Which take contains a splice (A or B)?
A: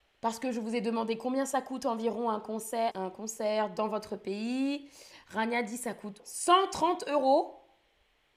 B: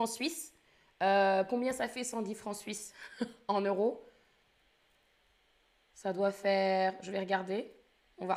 A